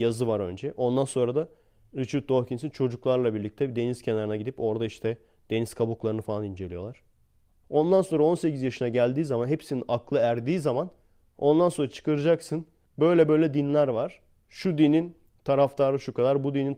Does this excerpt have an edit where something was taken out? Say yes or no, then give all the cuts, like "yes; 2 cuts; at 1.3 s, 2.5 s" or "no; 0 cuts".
yes; 2 cuts; at 7.6 s, 12.9 s